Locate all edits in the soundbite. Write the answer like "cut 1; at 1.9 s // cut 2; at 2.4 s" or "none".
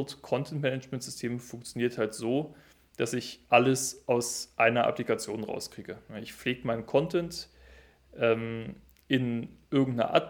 none